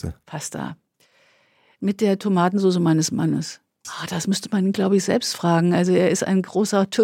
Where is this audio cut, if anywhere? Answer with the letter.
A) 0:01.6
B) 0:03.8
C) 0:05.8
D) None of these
B